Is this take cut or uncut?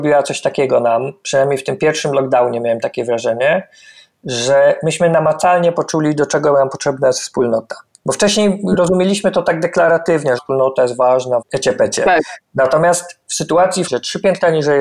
cut